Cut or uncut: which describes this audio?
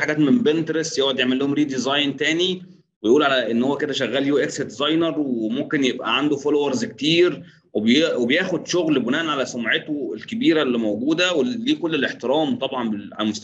uncut